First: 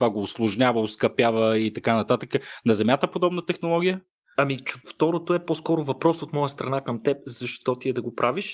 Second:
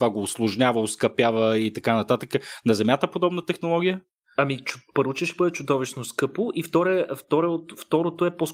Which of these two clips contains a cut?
first; 1 cut; at 4.8 s

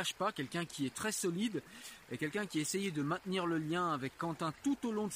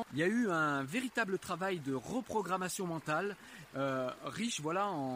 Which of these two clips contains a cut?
second; 1 cut; at 3.7 s

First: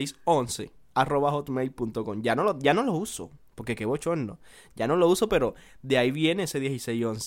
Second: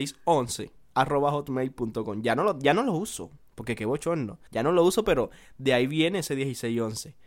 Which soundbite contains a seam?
second; 1 cut; at 4.5 s

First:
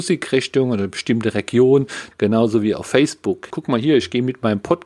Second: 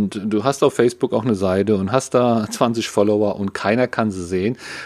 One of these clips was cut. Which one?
first; 2 cuts; at 2.1 s, 3.5 s

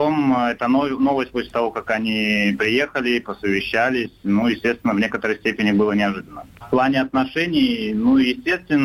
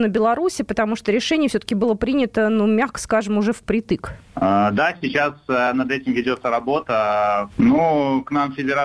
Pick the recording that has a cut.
second; 1 cut; at 7.5 s

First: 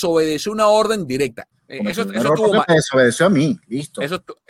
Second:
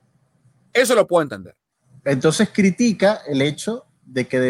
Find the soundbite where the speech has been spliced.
first; 1 cut; at 1.5 s

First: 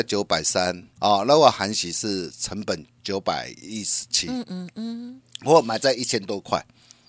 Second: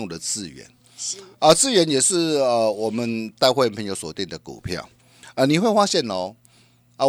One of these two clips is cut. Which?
first; 1 cut; at 0.9 s

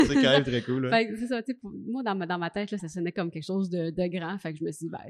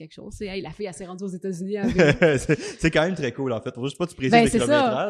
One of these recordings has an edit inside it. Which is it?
first; 1 cut; at 2.8 s

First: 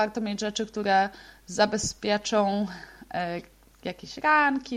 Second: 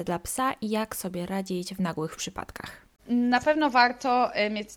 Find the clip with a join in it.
second; 1 cut; at 3.0 s

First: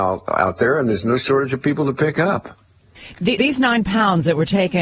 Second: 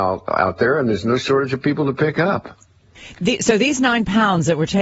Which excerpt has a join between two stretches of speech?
first; 1 cut; at 3.4 s

